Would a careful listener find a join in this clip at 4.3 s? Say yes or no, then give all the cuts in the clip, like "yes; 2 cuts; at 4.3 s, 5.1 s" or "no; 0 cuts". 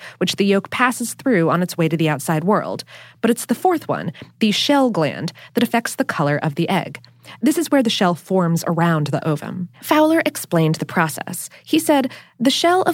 no; 1 cut; at 9.7 s